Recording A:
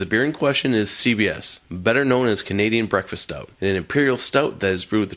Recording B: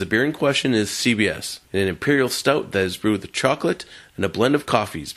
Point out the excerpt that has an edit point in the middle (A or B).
B